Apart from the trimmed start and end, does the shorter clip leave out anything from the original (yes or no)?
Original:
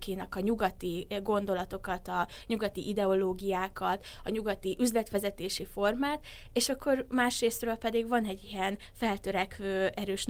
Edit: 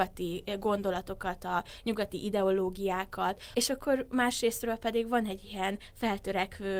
yes